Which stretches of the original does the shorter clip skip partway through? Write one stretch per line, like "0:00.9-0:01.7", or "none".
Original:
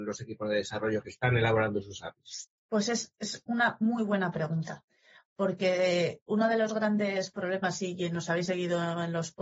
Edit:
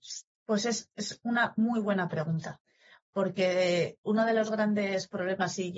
none

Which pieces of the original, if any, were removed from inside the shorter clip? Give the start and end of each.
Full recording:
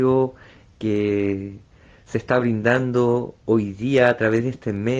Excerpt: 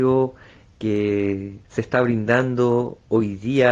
0:01.6-0:02.0

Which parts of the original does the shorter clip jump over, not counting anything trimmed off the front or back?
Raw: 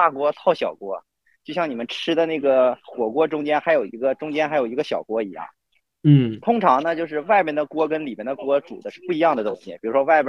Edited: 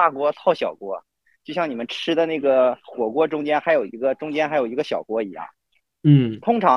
none

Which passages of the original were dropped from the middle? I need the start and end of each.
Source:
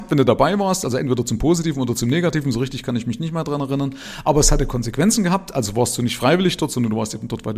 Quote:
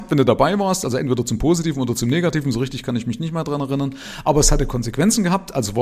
none

